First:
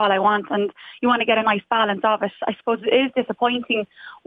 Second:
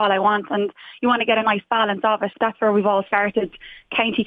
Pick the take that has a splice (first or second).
second